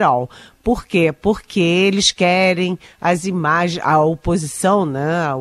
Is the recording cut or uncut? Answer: uncut